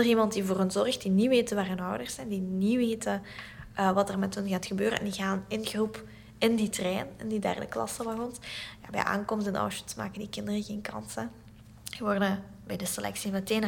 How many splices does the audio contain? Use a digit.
0